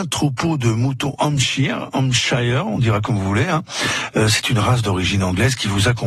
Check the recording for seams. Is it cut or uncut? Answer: uncut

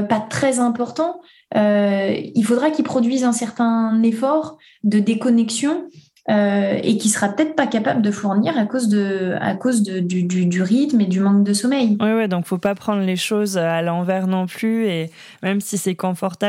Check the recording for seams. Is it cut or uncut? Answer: uncut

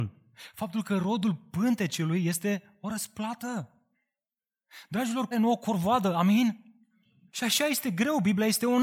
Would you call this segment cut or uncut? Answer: cut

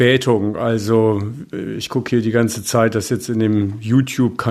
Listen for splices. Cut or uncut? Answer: uncut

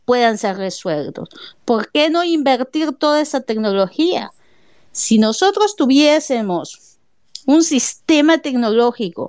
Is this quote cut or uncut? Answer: uncut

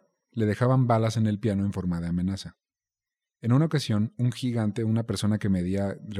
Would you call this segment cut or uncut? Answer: uncut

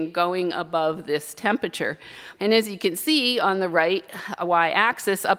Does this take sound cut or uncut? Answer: cut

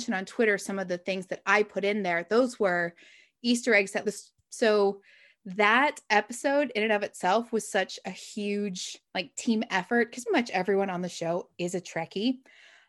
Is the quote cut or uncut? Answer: cut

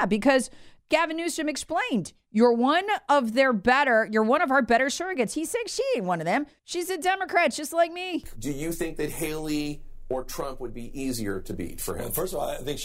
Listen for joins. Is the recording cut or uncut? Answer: cut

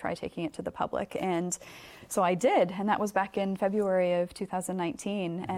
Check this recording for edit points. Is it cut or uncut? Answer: uncut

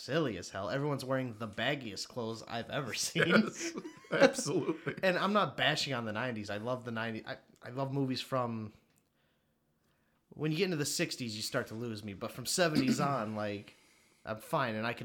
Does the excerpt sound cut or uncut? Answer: uncut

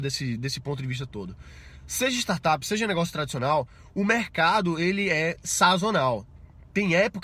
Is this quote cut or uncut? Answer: uncut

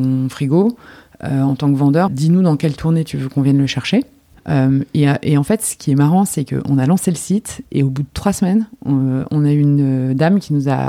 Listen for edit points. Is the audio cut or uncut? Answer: cut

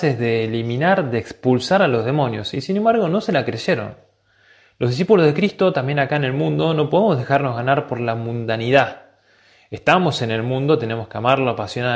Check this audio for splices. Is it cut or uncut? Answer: uncut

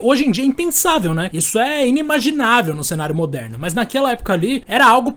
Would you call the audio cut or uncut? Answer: cut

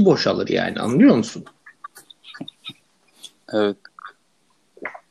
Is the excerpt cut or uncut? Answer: cut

